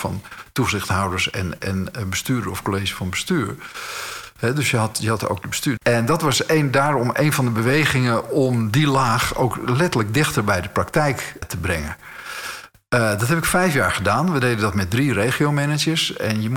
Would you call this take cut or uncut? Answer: cut